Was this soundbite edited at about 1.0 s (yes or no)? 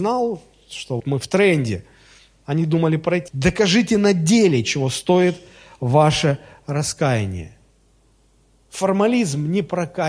yes